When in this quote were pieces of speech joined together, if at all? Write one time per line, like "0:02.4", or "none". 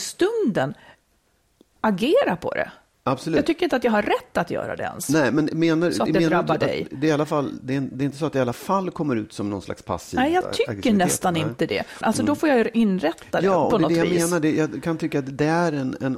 0:12.0